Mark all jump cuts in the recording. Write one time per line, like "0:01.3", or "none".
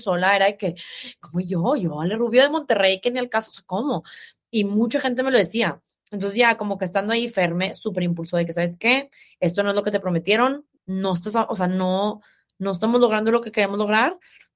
none